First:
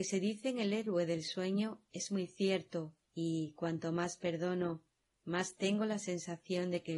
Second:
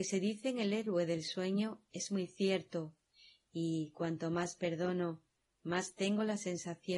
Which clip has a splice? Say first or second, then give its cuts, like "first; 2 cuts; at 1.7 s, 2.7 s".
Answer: first; 1 cut; at 3.0 s